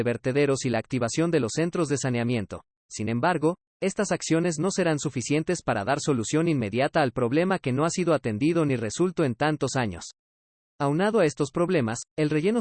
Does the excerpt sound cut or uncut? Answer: uncut